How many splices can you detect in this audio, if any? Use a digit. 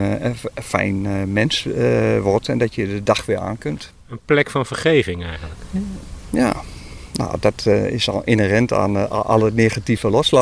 0